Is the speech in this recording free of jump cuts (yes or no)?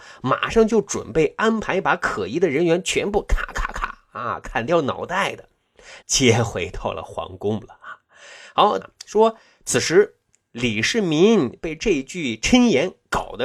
no